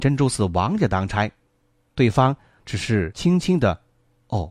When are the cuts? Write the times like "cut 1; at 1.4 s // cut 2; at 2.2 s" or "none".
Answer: none